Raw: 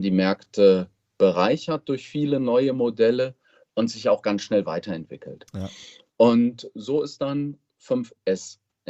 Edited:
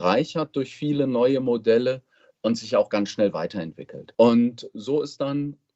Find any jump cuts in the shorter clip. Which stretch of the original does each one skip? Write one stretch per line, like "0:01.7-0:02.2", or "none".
0:05.5-0:06.1